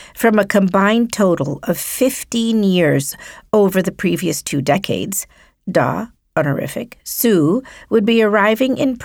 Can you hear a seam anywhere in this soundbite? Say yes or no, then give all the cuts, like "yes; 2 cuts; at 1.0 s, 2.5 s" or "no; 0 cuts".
no; 0 cuts